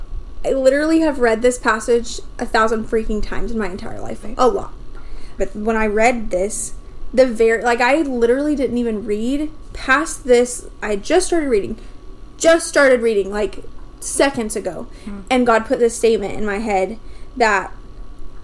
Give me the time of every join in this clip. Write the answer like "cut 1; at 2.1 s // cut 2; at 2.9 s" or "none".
cut 1; at 4.2 s // cut 2; at 5.4 s